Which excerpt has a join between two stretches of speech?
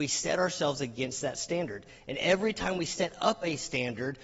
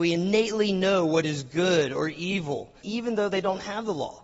second; 1 cut; at 2.8 s

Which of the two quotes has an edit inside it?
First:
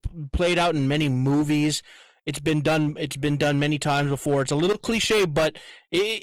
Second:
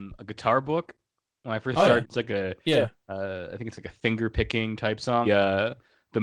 second; 2 cuts; at 2.0 s, 5.2 s

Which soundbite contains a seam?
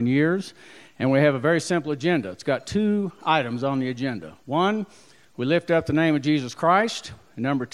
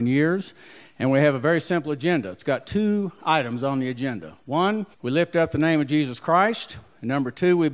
second; 1 cut; at 4.9 s

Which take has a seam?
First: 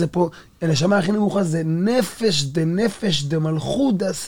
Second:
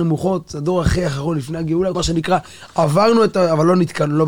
second; 1 cut; at 1.9 s

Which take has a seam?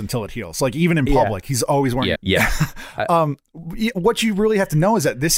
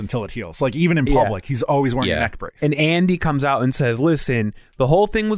first; 1 cut; at 2.2 s

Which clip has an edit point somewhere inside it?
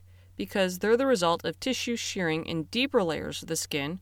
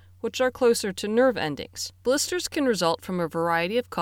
second; 1 cut; at 2.0 s

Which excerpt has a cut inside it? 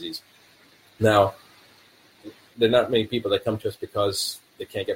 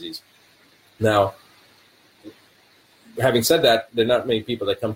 first; 1 cut; at 2.5 s

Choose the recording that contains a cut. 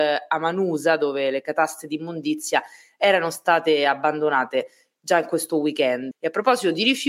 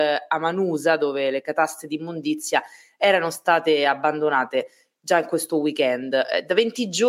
first; 1 cut; at 6.1 s

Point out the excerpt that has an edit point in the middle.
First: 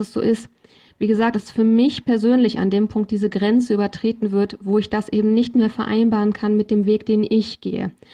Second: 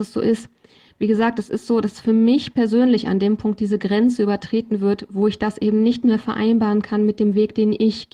first; 1 cut; at 1.3 s

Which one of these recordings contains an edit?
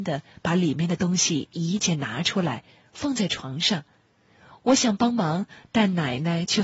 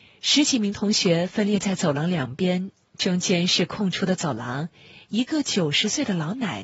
first; 2 cuts; at 1.8 s, 4.5 s

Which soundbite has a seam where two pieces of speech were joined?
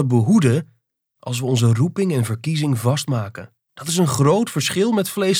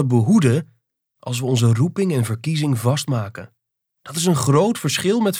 first; 1 cut; at 3.6 s

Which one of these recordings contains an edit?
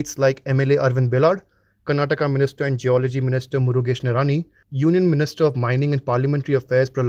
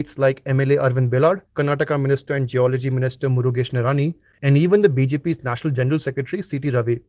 second; 2 cuts; at 1.5 s, 4.3 s

